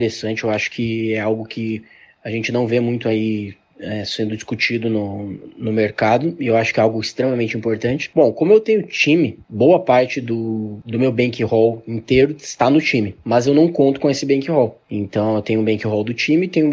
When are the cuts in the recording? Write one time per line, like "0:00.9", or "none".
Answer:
none